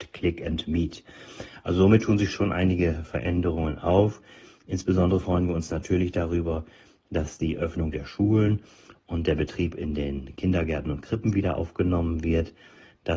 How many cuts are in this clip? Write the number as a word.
zero